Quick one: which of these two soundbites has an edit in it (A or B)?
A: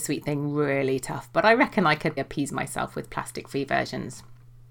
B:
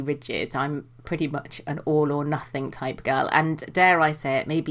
A